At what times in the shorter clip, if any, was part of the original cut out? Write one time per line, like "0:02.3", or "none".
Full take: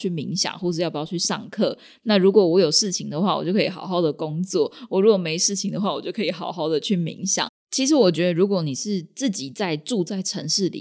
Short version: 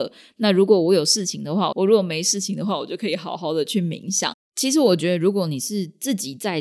0:01.7